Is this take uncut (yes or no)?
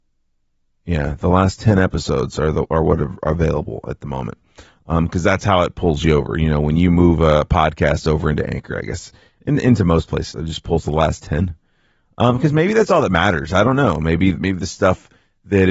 no